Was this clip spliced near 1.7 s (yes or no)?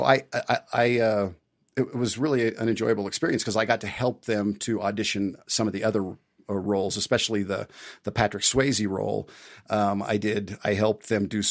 no